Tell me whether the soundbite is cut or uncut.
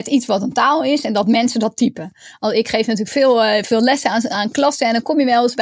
uncut